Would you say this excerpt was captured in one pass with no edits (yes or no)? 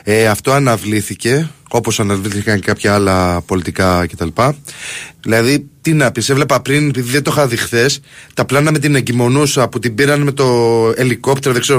no